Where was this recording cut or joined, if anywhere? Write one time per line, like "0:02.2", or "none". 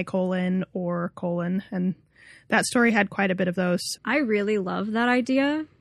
0:03.9

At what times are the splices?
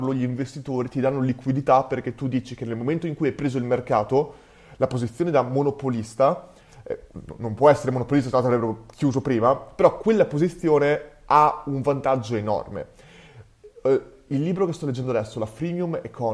none

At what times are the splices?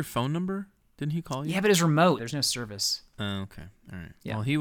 0:02.2

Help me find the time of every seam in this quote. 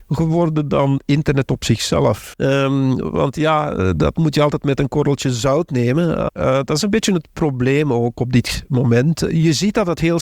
0:02.3
0:06.3

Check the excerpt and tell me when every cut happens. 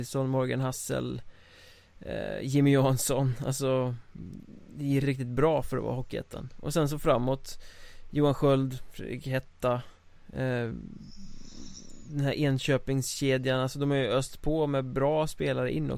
0:05.0

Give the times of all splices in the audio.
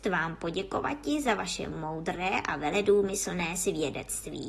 none

